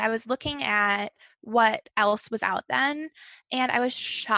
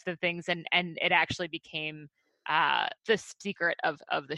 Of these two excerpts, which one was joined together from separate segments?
second; 1 cut; at 3.0 s

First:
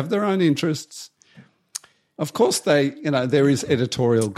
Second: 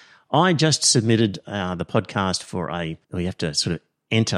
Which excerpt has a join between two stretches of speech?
second; 1 cut; at 3.0 s

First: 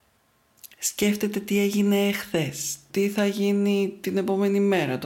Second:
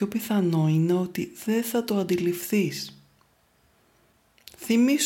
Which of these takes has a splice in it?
first; 1 cut; at 2.9 s

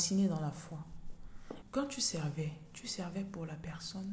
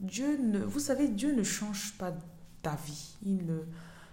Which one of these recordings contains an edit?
first; 1 cut; at 1.6 s

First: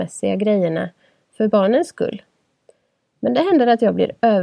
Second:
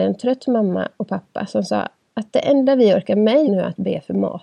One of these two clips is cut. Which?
second; 1 cut; at 3.5 s

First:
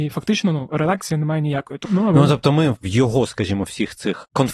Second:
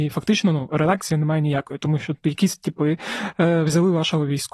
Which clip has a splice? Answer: first; 1 cut; at 1.9 s

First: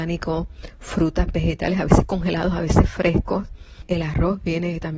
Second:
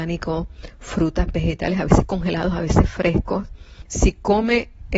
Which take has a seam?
second; 1 cut; at 3.9 s

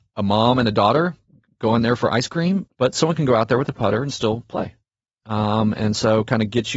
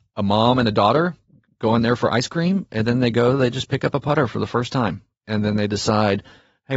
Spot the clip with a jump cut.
first; 1 cut; at 2.7 s

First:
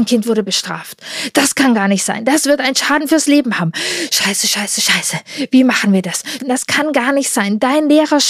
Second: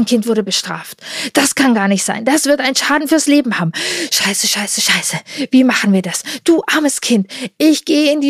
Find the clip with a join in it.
first; 1 cut; at 6.4 s

